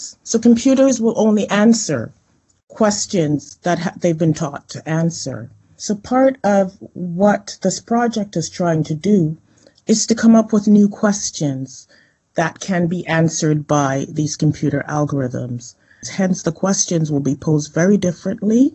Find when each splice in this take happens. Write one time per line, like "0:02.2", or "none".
0:16.0